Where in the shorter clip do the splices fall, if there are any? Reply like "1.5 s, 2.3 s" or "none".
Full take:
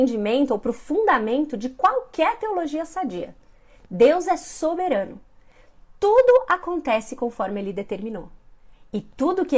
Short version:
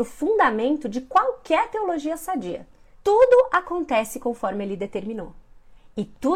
2.9 s